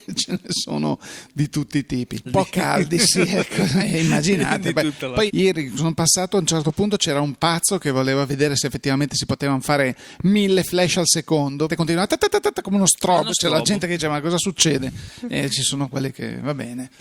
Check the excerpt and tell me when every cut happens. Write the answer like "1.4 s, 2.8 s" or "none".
2.3 s, 5.3 s, 11.7 s